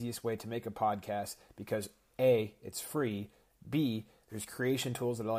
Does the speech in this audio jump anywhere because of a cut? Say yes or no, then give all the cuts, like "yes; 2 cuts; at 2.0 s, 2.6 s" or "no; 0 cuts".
no; 0 cuts